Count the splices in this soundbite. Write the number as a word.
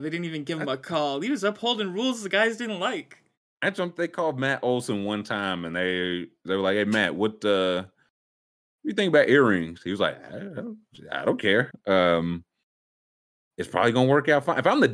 one